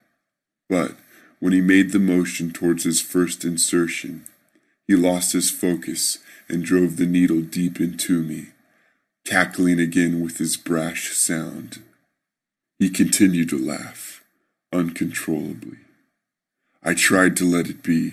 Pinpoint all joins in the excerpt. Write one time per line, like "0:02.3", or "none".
0:12.6